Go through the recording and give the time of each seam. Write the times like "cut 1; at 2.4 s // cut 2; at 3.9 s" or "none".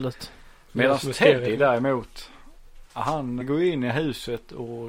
cut 1; at 3.4 s